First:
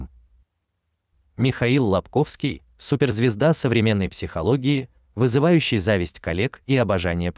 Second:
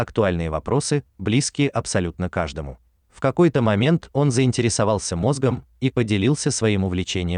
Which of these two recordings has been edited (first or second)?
second